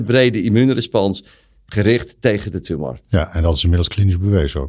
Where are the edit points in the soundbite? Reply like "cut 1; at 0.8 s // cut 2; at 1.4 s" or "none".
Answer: none